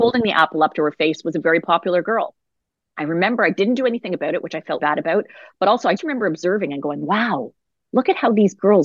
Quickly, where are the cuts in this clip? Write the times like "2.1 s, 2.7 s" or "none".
4.8 s, 6.0 s